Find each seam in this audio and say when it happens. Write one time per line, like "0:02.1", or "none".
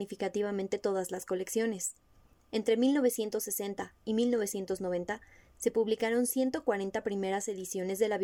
none